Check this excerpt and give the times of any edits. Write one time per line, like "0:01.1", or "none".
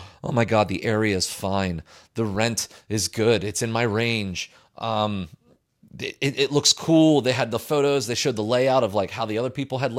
none